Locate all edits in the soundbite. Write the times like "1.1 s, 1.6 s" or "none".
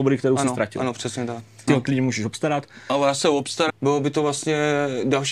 1.7 s, 3.7 s